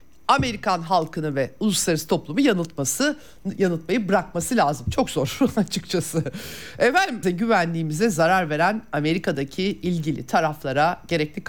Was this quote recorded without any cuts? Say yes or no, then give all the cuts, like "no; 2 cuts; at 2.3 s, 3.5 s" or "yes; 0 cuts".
no; 1 cut; at 7.2 s